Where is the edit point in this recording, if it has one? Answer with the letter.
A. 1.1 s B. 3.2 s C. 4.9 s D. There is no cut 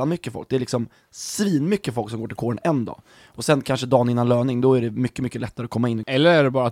D